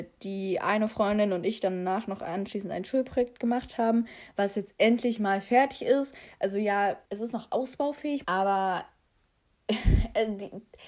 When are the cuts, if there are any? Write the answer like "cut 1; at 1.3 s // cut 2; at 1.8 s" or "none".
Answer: cut 1; at 7.0 s // cut 2; at 8.2 s